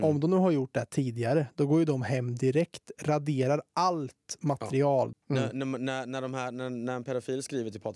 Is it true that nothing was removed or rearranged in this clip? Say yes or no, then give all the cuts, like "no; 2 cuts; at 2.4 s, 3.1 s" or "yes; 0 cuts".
no; 1 cut; at 5.1 s